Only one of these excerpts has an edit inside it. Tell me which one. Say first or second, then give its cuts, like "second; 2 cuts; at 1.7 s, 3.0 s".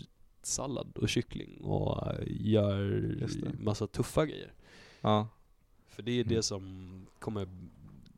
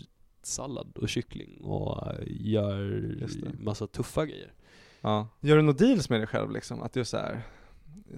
second; 1 cut; at 5.4 s